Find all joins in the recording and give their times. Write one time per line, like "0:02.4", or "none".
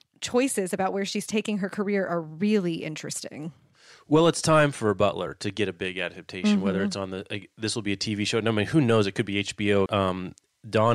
0:09.9